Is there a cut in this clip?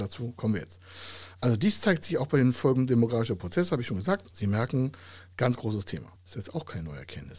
yes; 2 cuts; at 4.3 s, 6.2 s

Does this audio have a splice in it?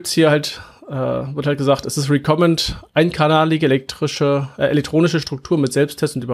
no; 0 cuts

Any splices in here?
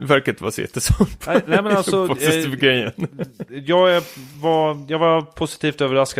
no; 0 cuts

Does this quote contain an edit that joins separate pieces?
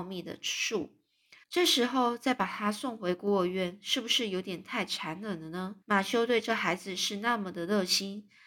yes; 2 cuts; at 1.4 s, 5.8 s

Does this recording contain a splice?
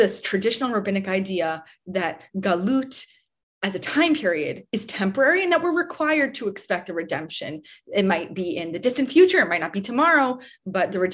no; 0 cuts

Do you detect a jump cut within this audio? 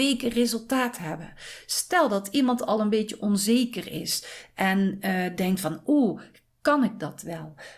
no; 0 cuts

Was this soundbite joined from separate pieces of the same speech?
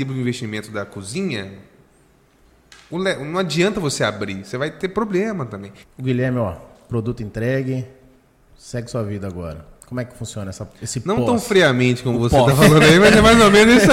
yes; 1 cut; at 5.8 s

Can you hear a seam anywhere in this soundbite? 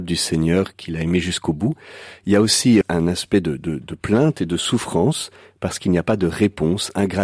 yes; 1 cut; at 2.8 s

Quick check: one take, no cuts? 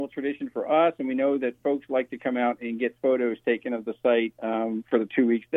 yes; 0 cuts

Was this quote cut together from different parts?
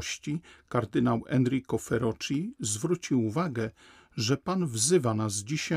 no; 0 cuts

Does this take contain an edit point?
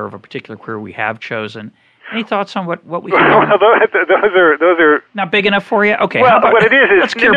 no; 0 cuts

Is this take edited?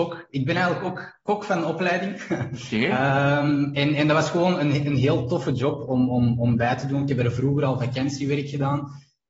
no; 0 cuts

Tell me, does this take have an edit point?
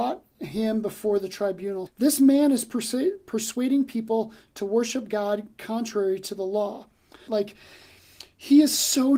yes; 2 cuts; at 1.9 s, 7.3 s

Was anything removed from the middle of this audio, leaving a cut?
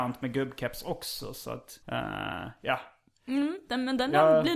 yes; 1 cut; at 1.8 s

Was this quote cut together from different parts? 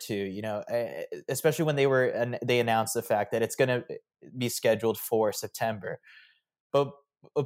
no; 0 cuts

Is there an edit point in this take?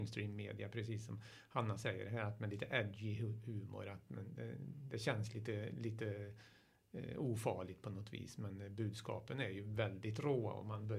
no; 0 cuts

